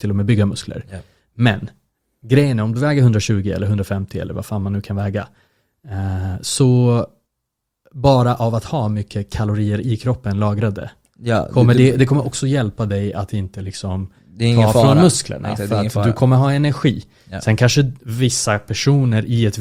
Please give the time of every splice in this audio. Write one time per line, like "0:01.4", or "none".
none